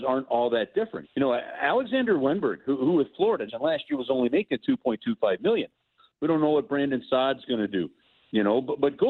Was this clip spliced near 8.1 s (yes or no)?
no